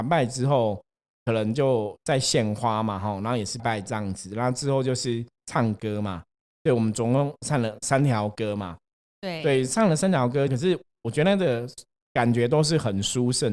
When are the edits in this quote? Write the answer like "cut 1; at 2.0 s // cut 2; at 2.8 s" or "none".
cut 1; at 3.6 s // cut 2; at 10.5 s